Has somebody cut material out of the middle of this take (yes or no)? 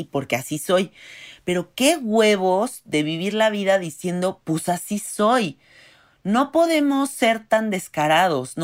no